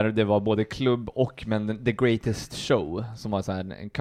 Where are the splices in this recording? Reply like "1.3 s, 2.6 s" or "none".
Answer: none